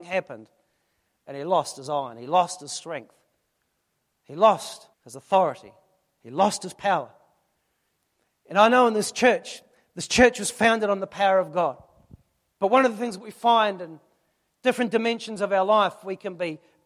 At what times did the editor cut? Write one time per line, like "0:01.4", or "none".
0:04.9
0:12.5